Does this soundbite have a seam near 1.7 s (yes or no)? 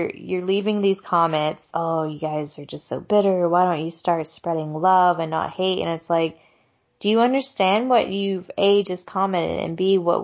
yes